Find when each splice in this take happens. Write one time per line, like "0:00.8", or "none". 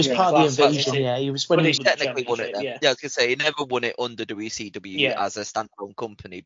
0:01.8